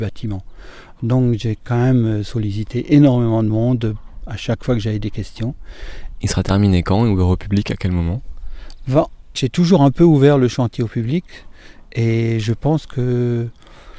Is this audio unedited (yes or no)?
no